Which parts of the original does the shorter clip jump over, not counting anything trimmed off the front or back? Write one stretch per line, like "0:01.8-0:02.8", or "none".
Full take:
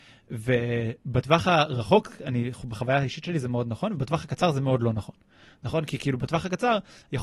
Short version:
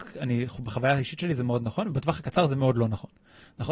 none